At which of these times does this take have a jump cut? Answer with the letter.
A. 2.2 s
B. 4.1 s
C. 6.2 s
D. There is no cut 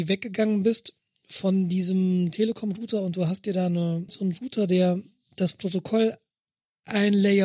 B